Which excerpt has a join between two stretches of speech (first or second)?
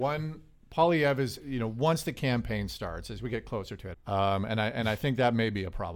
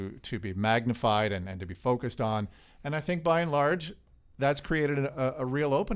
first